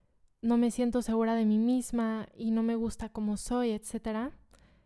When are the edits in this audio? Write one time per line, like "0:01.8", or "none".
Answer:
none